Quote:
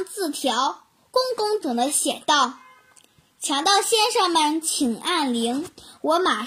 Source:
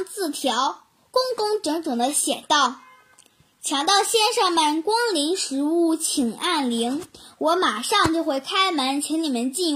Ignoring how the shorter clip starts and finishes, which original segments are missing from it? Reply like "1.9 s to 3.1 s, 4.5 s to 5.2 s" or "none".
1.6 s to 1.8 s, 4.8 s to 6.0 s